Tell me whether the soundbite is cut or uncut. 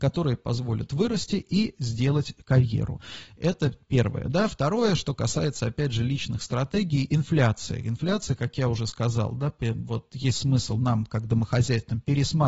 uncut